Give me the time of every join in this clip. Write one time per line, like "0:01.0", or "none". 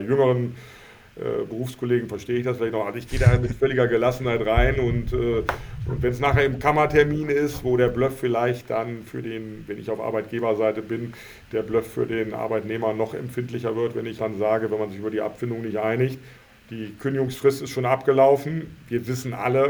0:14.2